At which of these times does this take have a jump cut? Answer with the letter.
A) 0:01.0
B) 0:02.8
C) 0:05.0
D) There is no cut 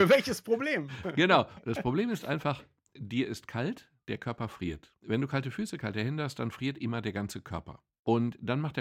D